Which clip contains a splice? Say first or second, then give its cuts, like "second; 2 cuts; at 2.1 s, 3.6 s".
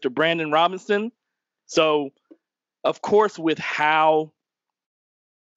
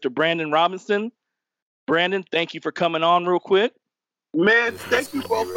first; 1 cut; at 1.6 s